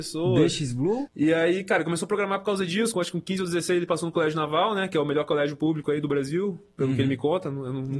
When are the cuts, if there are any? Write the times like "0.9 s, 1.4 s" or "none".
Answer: 1.1 s, 2.9 s